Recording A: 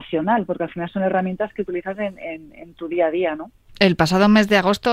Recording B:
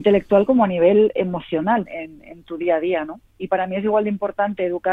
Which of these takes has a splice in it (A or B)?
B